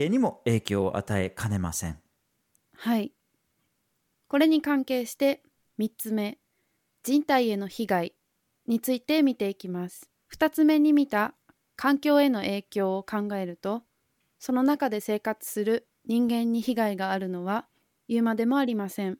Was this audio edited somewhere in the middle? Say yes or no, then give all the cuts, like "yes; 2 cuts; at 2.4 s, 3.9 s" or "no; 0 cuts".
yes; 2 cuts; at 10.2 s, 16.0 s